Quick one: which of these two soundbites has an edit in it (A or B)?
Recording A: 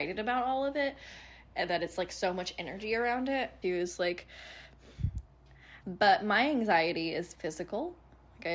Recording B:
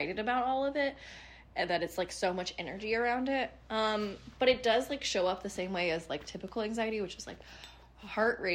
A